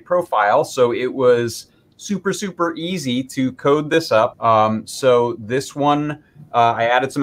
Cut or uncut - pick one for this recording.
cut